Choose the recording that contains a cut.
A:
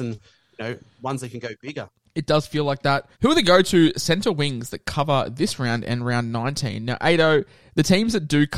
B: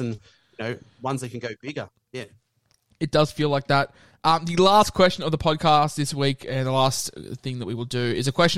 A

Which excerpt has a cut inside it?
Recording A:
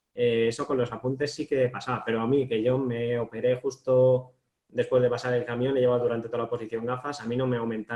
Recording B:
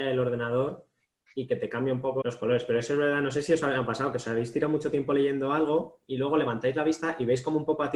B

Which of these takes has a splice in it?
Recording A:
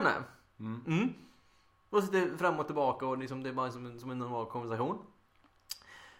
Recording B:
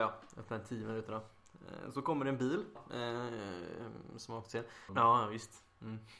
B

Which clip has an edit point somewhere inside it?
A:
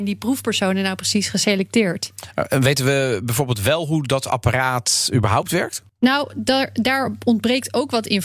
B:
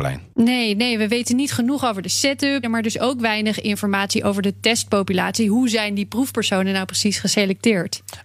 B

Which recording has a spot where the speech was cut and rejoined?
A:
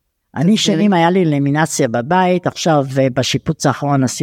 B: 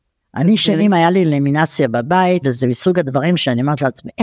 B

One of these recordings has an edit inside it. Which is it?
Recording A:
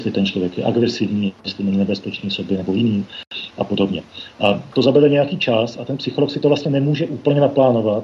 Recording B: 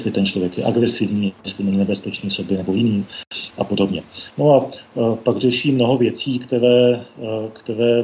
B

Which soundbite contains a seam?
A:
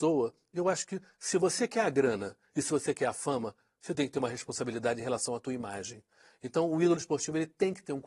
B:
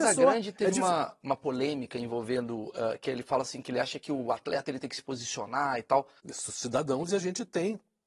B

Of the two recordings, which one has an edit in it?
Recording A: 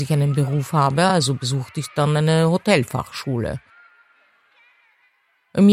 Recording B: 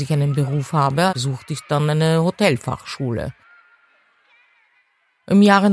B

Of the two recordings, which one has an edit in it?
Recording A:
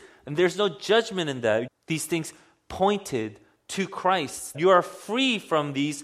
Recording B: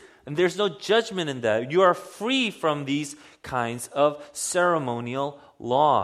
A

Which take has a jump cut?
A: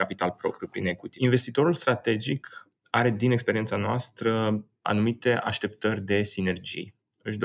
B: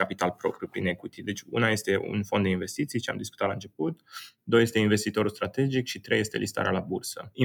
A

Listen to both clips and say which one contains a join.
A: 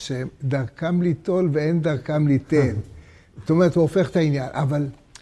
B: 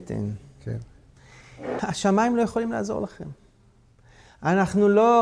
B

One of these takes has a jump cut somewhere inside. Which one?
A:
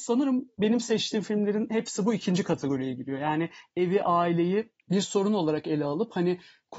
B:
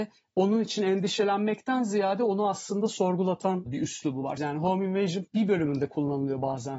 B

